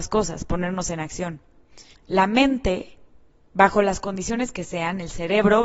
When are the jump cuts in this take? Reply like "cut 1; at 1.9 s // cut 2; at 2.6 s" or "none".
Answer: cut 1; at 1.9 s